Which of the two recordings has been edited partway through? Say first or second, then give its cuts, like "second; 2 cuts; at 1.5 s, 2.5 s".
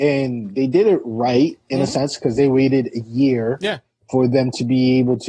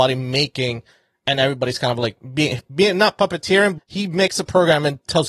second; 1 cut; at 3.8 s